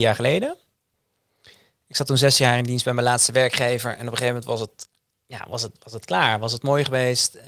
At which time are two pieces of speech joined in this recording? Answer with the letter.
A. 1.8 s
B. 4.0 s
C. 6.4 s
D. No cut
D